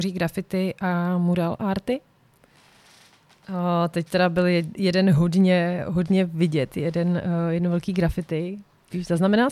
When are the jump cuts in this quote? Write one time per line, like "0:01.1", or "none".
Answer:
none

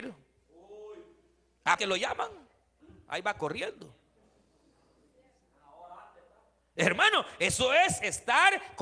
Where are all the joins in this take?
0:01.8

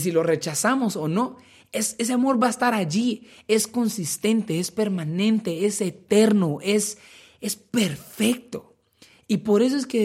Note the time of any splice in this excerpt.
none

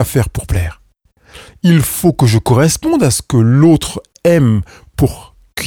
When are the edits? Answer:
none

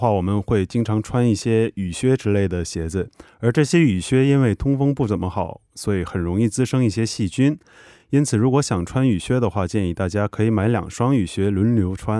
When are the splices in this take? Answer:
none

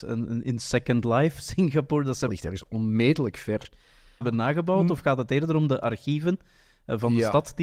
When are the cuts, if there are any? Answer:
0:02.3
0:04.2

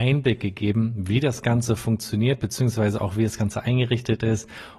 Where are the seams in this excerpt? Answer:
none

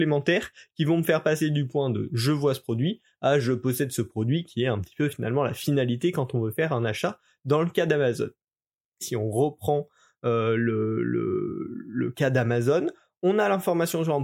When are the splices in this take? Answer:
0:09.0

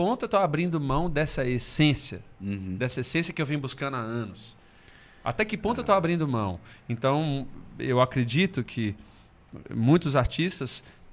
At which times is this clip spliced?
none

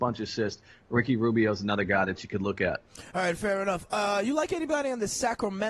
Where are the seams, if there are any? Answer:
none

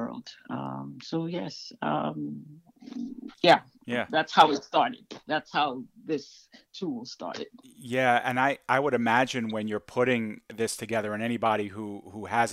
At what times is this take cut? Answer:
0:03.3

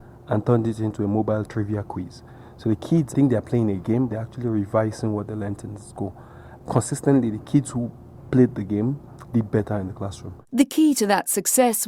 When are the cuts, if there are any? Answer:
0:04.1

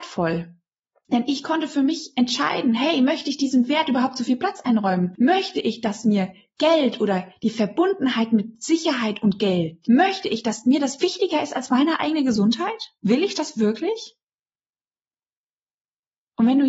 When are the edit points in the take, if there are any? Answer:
0:09.8
0:11.0
0:13.0

